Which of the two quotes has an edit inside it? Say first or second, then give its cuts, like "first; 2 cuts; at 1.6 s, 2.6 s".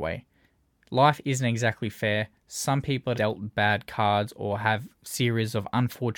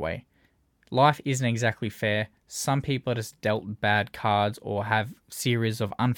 first; 1 cut; at 3.1 s